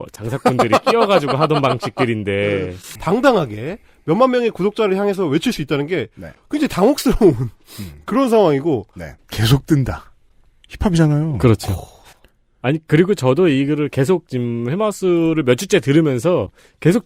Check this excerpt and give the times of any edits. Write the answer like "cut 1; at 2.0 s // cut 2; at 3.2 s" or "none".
cut 1; at 3.0 s // cut 2; at 9.2 s